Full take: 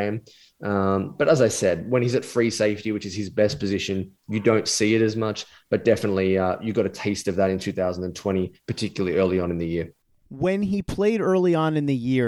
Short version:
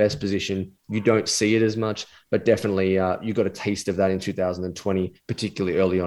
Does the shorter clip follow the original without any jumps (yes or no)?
yes